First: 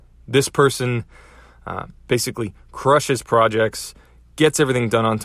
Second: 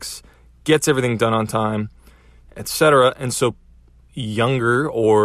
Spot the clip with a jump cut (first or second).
second